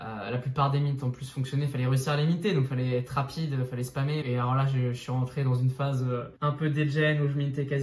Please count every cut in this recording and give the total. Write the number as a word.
two